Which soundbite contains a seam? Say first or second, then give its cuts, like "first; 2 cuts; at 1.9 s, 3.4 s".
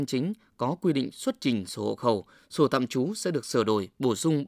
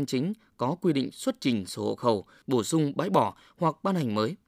second; 1 cut; at 2.4 s